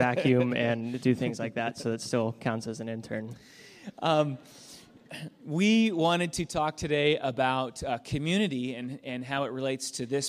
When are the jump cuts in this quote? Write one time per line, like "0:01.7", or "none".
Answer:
none